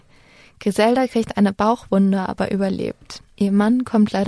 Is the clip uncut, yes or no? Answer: no